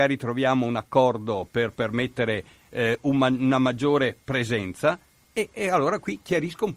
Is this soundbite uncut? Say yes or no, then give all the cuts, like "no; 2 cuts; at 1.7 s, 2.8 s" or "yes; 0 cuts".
yes; 0 cuts